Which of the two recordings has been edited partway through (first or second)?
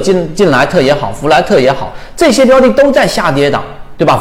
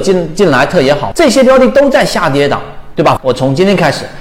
second